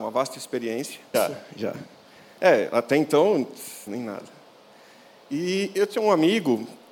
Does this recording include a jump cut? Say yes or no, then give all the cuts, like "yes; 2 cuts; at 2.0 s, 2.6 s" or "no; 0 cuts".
yes; 2 cuts; at 1.1 s, 3.9 s